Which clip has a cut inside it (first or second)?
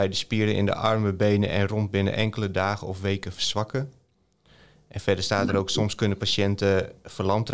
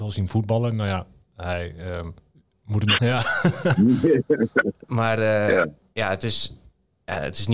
second